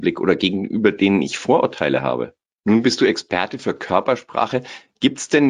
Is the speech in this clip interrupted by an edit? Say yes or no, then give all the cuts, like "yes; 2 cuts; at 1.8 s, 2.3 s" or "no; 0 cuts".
yes; 1 cut; at 2.6 s